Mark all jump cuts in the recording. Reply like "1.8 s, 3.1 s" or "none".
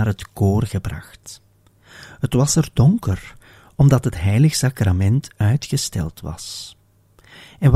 none